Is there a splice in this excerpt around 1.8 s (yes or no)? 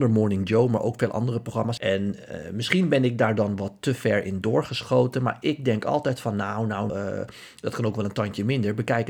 yes